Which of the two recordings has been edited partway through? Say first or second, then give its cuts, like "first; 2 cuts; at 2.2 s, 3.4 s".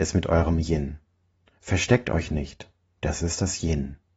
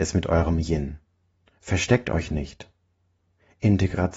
first; 1 cut; at 2.9 s